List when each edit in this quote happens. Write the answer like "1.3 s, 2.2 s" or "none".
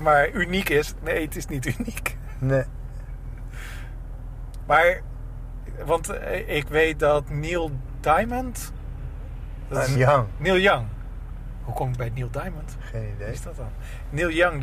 9.9 s